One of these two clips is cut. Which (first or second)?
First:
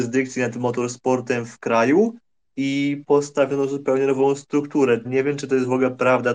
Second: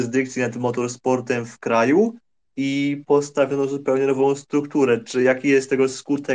first